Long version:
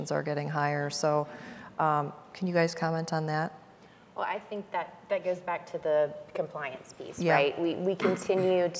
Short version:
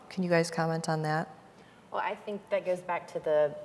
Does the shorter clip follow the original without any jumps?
no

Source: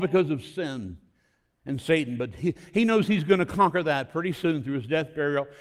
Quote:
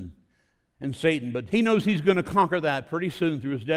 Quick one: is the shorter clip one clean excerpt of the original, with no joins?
no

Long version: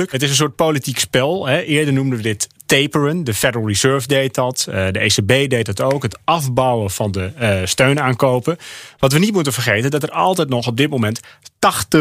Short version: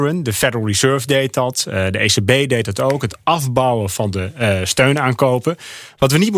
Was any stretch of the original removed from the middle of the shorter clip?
no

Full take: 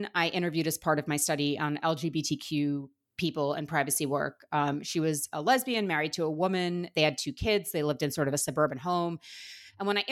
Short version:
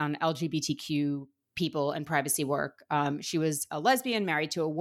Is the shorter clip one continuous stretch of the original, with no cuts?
yes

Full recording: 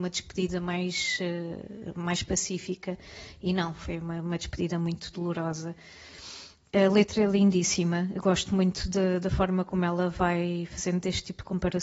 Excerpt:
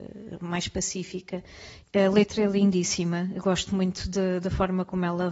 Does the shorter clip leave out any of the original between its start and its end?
yes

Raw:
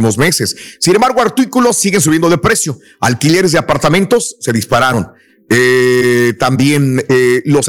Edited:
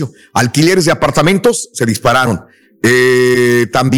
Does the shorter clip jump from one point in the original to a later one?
no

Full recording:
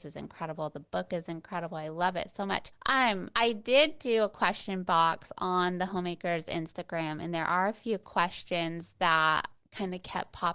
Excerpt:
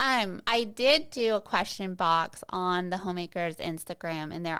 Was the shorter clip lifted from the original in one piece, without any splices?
yes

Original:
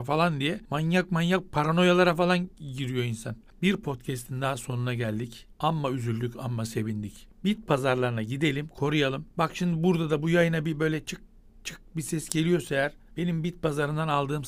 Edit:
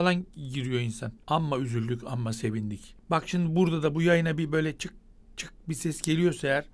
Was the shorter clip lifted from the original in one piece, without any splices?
no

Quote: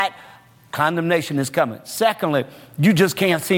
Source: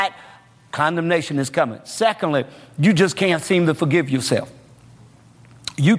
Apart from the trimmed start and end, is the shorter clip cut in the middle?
no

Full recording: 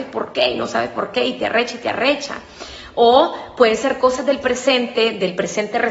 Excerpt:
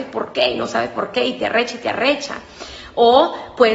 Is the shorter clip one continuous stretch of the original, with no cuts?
yes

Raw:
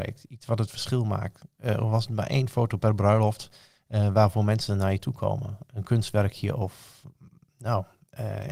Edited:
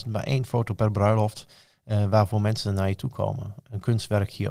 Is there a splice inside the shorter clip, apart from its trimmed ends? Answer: no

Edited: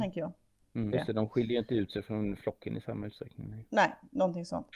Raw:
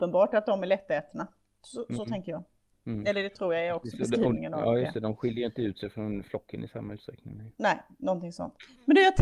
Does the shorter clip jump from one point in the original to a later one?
yes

